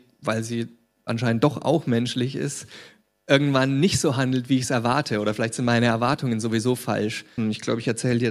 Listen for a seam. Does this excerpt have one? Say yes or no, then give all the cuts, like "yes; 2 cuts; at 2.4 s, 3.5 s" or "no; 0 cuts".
yes; 1 cut; at 7.4 s